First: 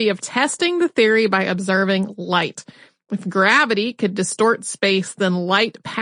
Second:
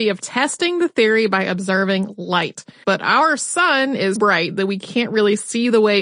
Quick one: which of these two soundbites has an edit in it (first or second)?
second